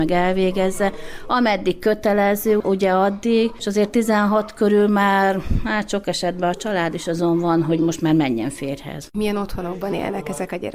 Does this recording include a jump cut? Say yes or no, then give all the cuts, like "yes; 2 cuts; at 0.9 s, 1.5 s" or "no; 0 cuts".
no; 0 cuts